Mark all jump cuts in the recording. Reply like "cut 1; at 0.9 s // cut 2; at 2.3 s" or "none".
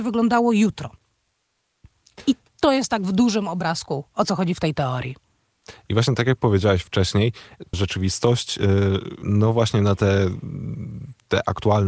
cut 1; at 7.7 s // cut 2; at 9.2 s

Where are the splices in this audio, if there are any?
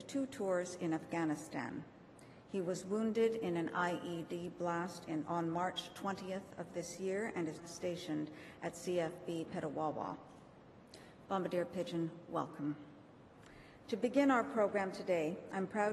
cut 1; at 7.6 s // cut 2; at 11.3 s

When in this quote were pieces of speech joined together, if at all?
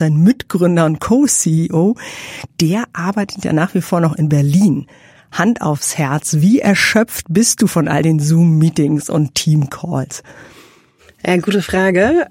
cut 1; at 2.5 s

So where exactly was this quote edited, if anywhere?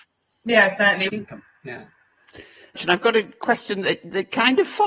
cut 1; at 1.1 s // cut 2; at 2.8 s

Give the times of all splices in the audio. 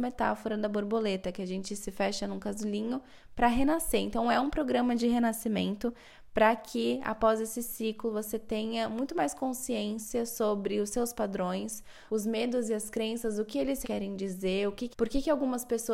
cut 1; at 12.1 s // cut 2; at 13.8 s // cut 3; at 14.9 s

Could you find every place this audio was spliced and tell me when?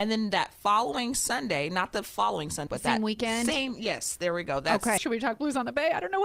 cut 1; at 2.7 s // cut 2; at 5.0 s

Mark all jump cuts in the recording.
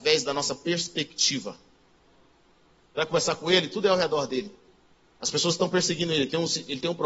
cut 1; at 2.9 s

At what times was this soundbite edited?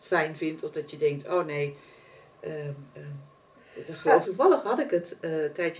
cut 1; at 4.2 s

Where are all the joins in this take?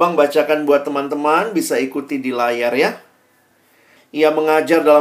cut 1; at 4.0 s

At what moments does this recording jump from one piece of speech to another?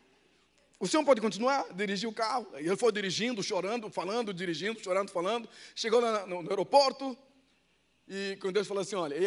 none

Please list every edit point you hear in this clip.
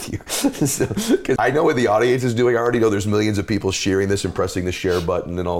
cut 1; at 1.4 s

